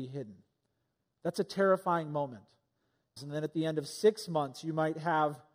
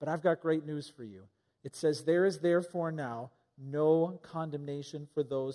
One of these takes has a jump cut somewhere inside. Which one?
first; 1 cut; at 3.2 s

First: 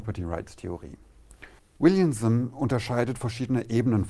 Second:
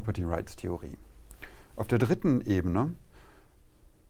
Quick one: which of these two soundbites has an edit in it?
first; 1 cut; at 1.6 s

